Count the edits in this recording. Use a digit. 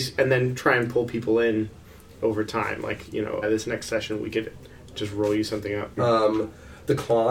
2